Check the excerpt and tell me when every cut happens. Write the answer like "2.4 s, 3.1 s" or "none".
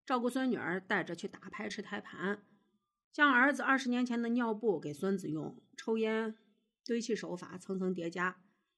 1.7 s